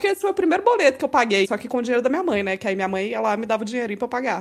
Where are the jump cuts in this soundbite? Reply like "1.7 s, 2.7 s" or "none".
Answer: 1.4 s